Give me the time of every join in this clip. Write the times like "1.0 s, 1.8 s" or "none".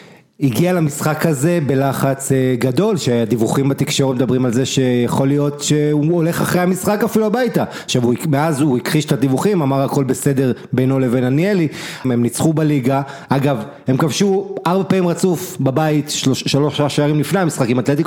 12.0 s